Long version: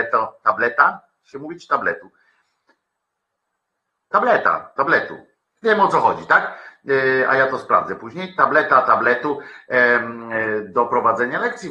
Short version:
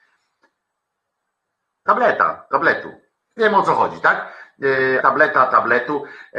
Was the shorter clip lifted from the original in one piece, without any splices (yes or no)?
no